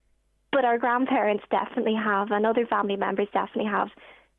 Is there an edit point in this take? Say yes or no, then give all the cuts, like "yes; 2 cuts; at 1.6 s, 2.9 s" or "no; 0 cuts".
no; 0 cuts